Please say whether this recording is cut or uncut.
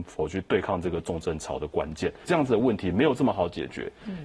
cut